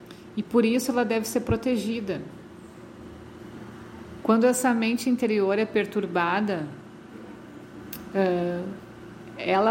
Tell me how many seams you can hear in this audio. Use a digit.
1